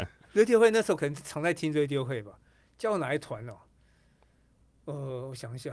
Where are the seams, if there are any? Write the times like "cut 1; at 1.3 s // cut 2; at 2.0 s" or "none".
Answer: none